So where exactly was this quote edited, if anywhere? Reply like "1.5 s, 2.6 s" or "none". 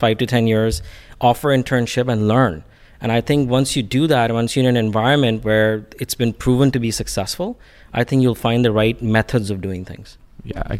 none